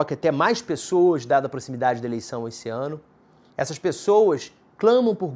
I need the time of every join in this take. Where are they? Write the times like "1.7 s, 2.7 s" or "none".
3.5 s